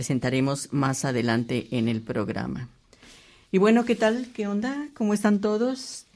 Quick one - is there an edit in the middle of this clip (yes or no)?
no